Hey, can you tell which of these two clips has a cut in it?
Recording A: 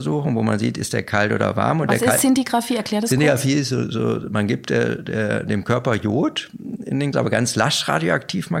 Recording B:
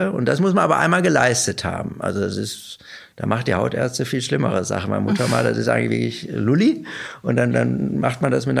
A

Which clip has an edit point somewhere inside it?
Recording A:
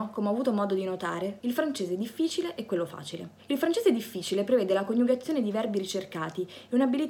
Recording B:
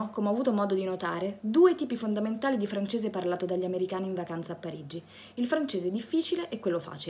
A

